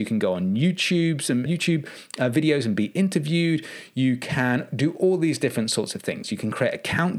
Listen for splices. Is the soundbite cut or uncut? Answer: cut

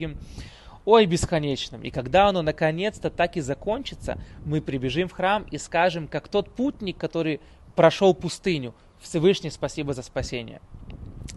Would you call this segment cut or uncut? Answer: uncut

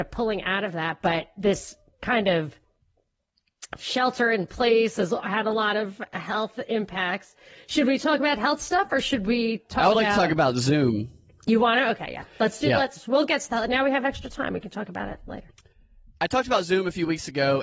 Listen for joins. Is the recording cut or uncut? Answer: uncut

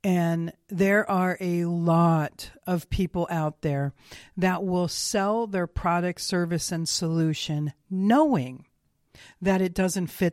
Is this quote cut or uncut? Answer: uncut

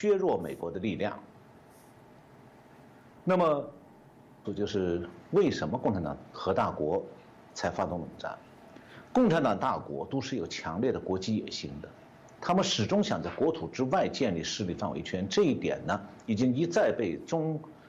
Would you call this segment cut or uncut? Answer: cut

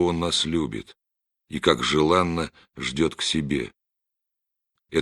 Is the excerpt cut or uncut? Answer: uncut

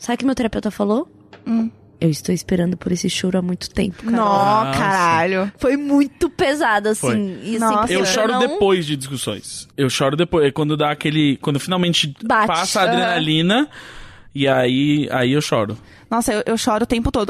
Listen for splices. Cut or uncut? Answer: cut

